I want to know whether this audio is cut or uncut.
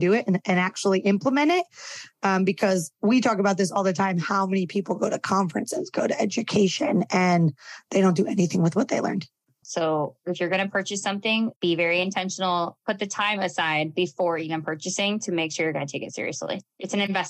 cut